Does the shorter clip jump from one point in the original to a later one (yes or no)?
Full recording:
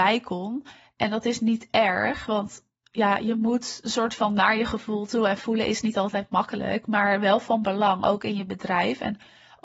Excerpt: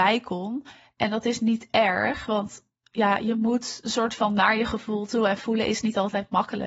no